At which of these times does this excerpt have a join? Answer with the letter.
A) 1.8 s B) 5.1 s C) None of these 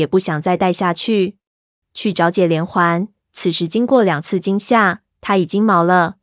A